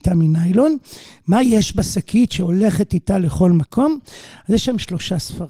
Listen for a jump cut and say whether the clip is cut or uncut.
uncut